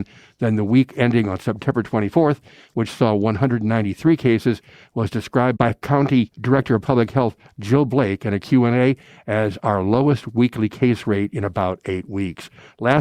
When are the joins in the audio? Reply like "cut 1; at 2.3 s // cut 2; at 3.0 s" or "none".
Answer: none